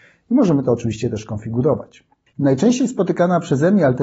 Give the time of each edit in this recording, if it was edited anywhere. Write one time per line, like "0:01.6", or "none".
0:02.3